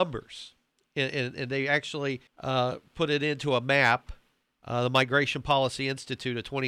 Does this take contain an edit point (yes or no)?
yes